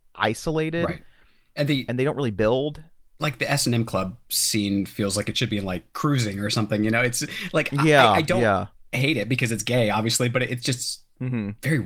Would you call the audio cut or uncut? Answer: uncut